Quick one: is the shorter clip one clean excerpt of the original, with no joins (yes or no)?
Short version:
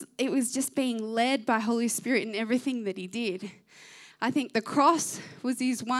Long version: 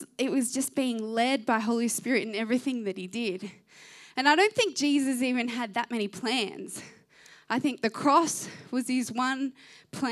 no